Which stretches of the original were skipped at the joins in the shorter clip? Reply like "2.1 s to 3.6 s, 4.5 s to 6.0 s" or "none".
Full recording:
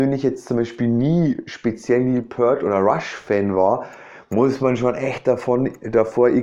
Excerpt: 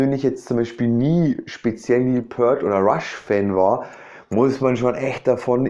none